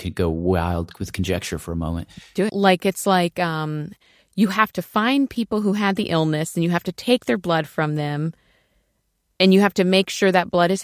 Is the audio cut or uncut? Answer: cut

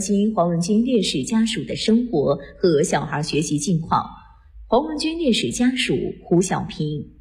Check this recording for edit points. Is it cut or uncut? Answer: uncut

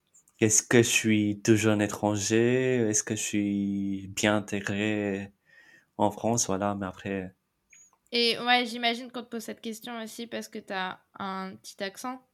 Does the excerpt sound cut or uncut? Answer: uncut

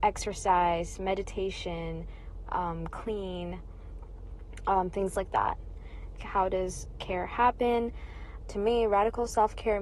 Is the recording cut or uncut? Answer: cut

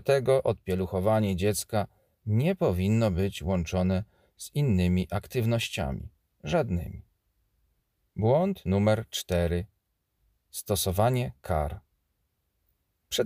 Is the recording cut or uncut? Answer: uncut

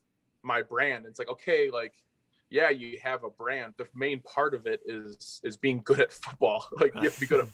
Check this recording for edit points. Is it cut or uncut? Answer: cut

